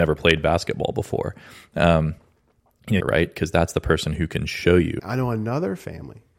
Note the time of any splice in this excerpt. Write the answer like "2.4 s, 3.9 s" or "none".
3.0 s, 5.0 s